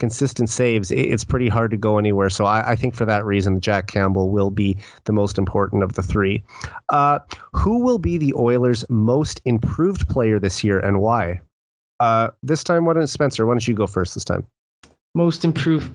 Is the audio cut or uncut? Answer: uncut